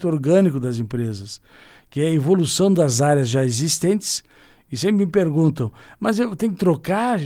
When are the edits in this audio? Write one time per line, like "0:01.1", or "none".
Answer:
none